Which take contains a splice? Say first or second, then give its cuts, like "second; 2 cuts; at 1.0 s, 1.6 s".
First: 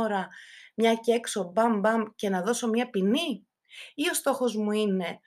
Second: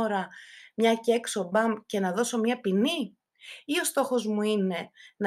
second; 1 cut; at 1.5 s